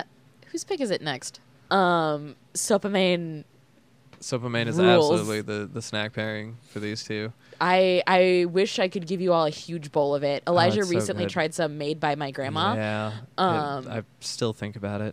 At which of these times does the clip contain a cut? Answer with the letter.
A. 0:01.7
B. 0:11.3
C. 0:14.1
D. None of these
A